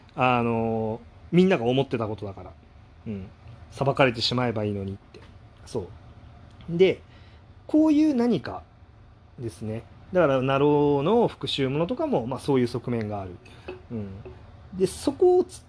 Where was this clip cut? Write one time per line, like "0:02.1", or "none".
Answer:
none